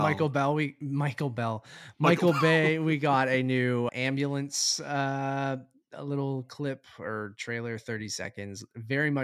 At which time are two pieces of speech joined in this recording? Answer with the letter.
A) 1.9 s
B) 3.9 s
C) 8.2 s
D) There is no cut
B